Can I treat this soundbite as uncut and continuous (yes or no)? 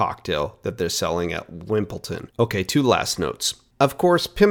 no